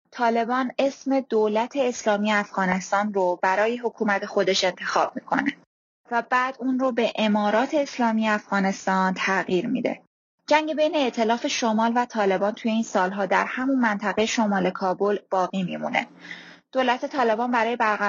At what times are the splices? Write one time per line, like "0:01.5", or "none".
none